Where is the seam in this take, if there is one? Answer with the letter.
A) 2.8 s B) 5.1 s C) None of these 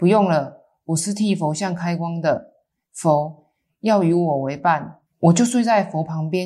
B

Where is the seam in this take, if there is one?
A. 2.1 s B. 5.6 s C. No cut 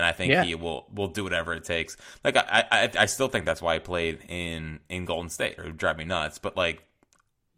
B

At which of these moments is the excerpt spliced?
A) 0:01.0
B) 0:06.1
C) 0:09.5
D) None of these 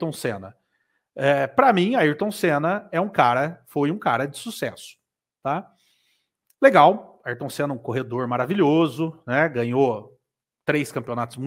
D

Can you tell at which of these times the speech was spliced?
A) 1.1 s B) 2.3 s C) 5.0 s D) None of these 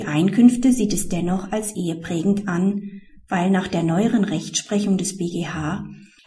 D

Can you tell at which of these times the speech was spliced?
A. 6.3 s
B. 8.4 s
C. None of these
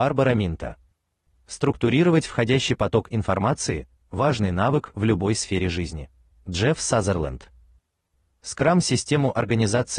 A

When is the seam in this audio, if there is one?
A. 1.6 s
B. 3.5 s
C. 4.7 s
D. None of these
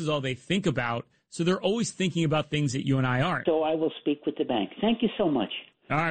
B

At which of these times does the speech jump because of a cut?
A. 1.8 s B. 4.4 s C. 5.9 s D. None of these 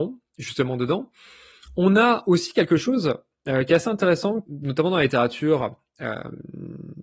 B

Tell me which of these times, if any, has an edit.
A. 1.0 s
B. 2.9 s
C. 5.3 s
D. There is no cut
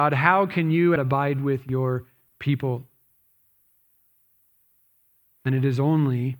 A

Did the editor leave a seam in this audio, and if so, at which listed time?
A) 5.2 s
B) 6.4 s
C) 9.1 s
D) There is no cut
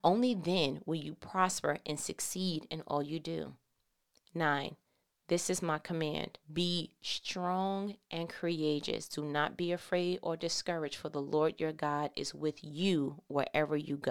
B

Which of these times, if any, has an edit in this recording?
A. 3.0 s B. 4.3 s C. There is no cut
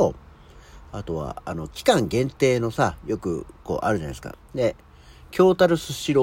B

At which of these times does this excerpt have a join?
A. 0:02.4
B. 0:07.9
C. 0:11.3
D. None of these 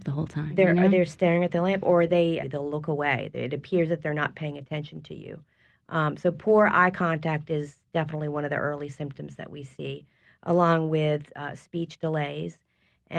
A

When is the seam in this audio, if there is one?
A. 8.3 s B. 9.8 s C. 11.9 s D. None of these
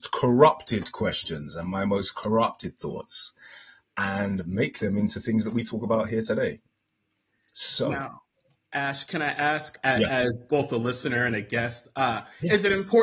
B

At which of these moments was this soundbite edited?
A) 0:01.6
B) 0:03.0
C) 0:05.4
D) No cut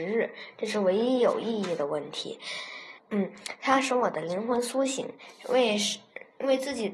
B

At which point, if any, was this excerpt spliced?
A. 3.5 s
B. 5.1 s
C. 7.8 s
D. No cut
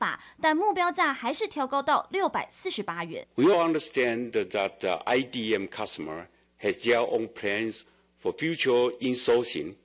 A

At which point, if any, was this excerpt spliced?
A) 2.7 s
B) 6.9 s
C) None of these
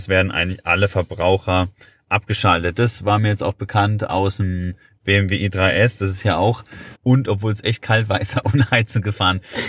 B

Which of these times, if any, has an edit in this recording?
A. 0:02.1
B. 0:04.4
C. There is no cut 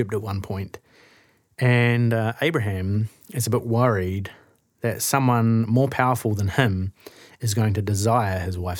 C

